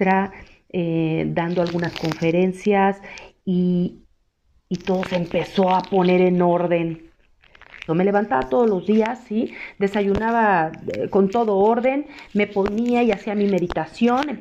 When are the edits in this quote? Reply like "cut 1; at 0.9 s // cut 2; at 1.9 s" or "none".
cut 1; at 7.9 s